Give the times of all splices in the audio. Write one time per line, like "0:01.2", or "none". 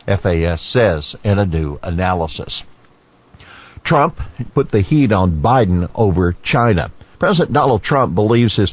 0:04.5
0:07.1

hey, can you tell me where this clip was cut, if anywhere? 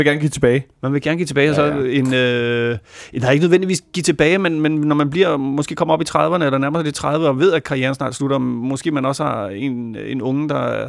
none

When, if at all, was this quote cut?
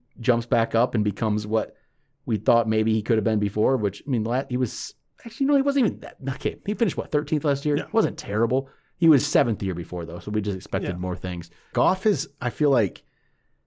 0:11.7

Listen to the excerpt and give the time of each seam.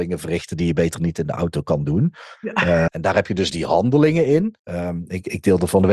0:02.9
0:04.6

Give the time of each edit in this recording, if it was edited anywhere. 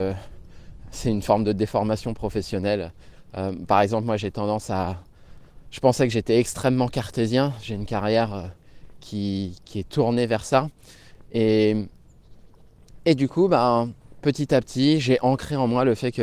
none

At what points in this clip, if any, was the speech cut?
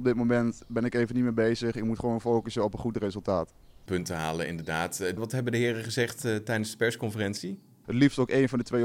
0:05.2
0:07.8

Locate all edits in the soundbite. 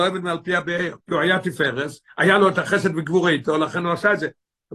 0:01.0

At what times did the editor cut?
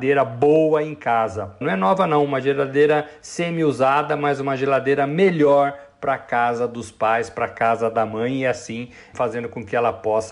0:01.6

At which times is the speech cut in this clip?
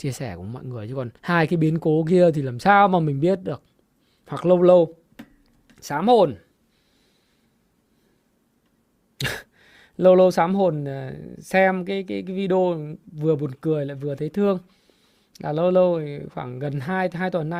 0:01.2

